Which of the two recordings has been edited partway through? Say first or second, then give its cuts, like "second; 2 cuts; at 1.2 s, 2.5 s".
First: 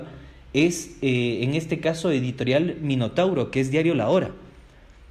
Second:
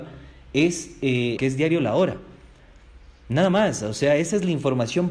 second; 1 cut; at 1.4 s